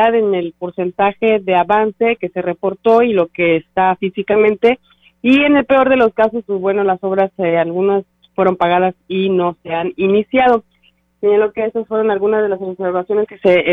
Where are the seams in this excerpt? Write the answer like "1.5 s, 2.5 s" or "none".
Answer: none